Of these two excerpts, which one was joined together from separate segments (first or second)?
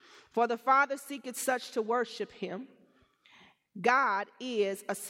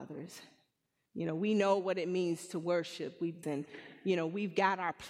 second